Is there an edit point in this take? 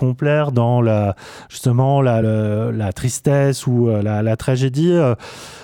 no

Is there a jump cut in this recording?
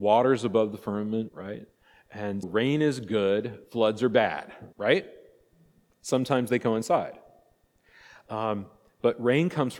yes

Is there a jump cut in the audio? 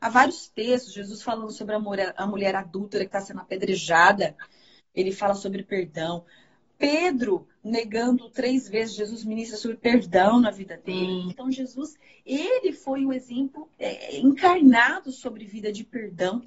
yes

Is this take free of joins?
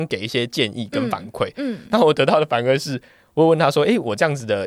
yes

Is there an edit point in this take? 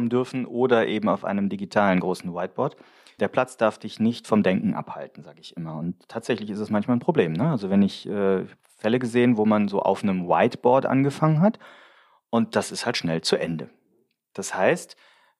no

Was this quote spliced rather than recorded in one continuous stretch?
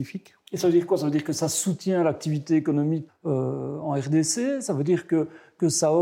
yes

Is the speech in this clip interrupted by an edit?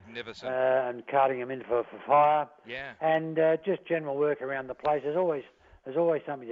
no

